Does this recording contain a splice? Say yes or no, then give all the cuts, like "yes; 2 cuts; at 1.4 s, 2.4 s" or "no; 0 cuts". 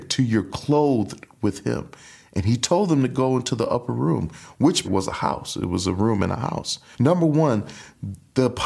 yes; 2 cuts; at 4.8 s, 6.9 s